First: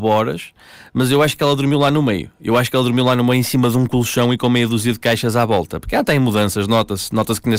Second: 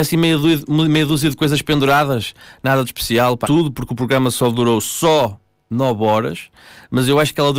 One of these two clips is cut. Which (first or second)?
second